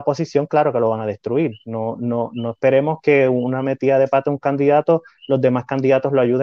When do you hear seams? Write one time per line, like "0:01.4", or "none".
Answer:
none

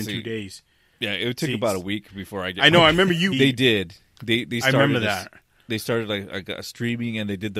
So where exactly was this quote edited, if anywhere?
0:03.3

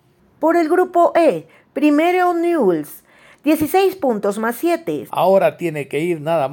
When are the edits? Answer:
0:05.1

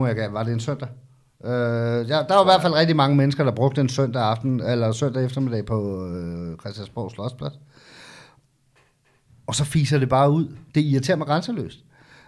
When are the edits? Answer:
none

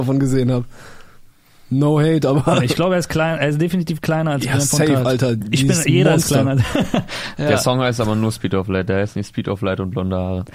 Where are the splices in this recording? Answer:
none

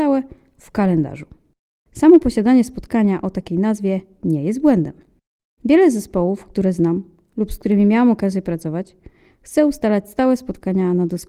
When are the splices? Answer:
0:05.6

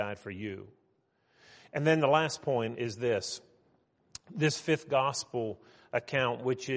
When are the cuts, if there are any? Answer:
0:02.7

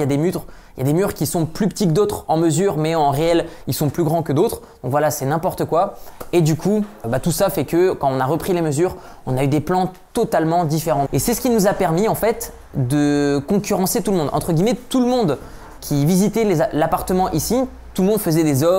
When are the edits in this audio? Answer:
0:07.0
0:11.1
0:15.8

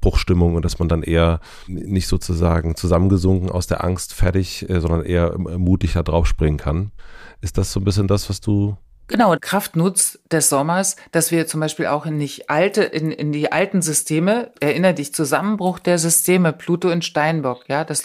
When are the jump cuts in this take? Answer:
0:09.4
0:14.6

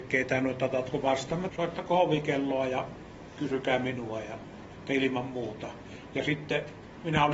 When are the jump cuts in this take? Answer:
0:01.5

